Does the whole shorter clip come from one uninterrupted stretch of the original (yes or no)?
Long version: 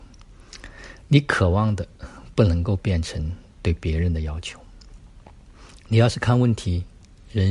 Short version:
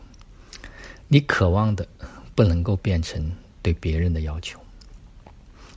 yes